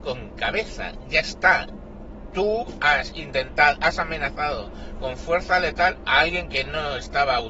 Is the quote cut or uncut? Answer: uncut